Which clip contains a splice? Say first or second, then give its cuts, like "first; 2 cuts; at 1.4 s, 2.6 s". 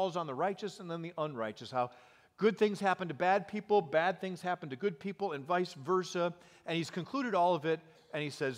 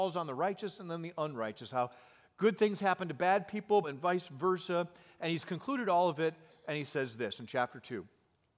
second; 1 cut; at 3.8 s